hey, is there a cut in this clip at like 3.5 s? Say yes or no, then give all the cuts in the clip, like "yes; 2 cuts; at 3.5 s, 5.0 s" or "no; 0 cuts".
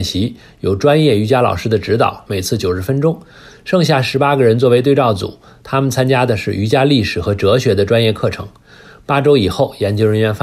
no; 1 cut; at 2.3 s